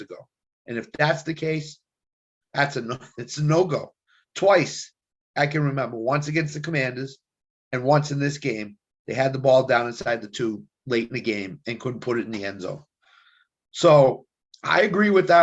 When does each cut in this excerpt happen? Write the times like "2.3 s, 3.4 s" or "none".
none